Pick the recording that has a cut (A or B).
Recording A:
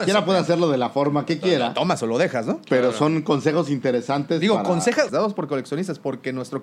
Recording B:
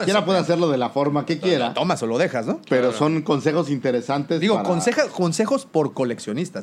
A